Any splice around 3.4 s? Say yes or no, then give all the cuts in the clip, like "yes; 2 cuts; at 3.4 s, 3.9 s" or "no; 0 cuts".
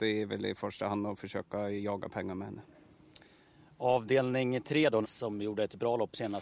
no; 1 cut; at 5.0 s